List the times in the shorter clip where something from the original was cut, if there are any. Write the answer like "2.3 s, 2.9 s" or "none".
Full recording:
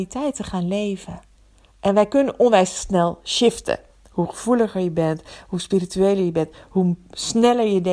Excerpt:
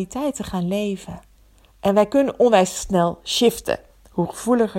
none